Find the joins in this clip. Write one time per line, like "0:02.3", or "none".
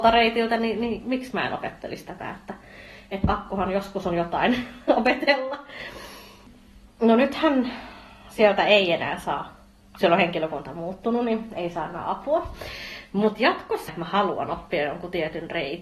0:13.9